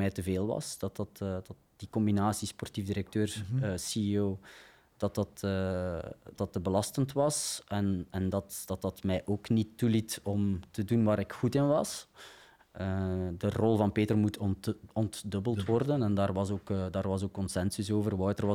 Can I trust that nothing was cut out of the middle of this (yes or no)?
no